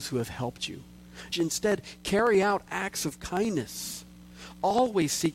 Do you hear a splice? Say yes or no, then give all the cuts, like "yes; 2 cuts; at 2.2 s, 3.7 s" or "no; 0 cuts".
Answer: yes; 1 cut; at 1.3 s